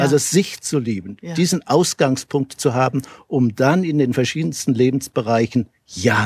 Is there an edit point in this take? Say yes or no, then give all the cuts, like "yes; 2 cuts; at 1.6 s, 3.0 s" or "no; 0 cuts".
no; 0 cuts